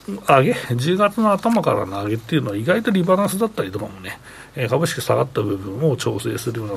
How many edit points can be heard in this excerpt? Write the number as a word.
zero